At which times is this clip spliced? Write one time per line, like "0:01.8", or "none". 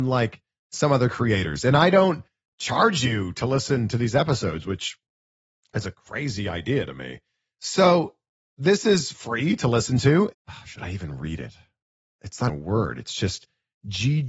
0:10.3
0:12.5